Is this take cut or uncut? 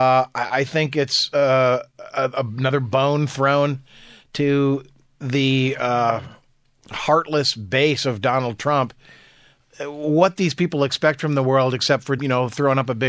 cut